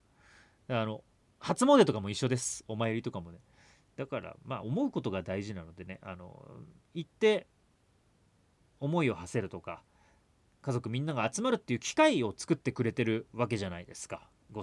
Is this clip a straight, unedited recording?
yes; 0 cuts

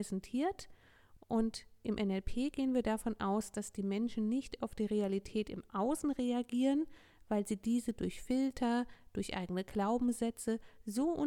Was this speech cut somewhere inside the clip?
no; 0 cuts

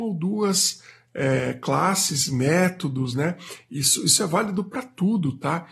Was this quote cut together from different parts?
no; 0 cuts

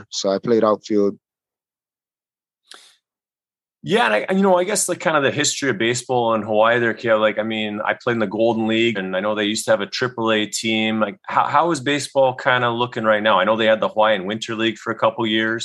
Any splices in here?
yes; 1 cut; at 9.0 s

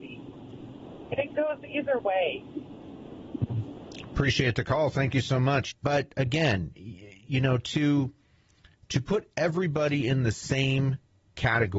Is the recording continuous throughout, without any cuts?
no; 1 cut; at 5.7 s

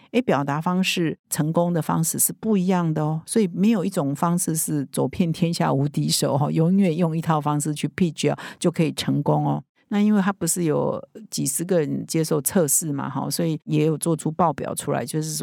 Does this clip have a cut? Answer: no; 0 cuts

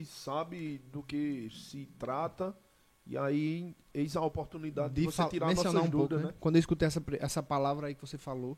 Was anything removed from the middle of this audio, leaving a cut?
yes; 1 cut; at 6.4 s

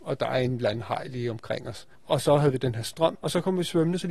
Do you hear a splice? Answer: yes; 2 cuts; at 1.9 s, 3.1 s

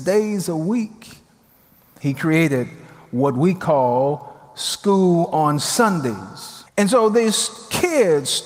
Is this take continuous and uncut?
no; 2 cuts; at 2.0 s, 6.7 s

